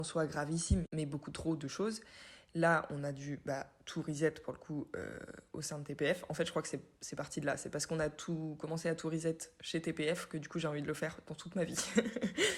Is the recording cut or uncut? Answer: uncut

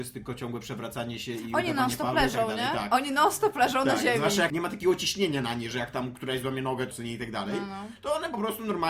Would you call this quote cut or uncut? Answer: cut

